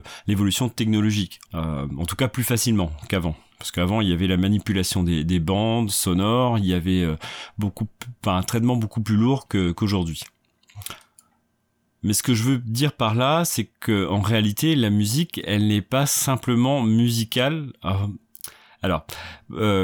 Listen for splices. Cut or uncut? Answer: cut